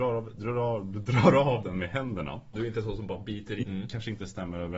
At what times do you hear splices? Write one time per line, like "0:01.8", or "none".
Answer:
0:02.5
0:03.6